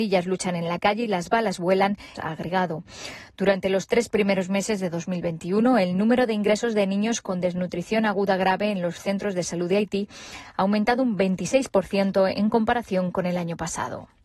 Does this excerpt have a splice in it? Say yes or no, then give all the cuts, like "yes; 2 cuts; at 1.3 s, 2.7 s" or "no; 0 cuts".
yes; 1 cut; at 2.2 s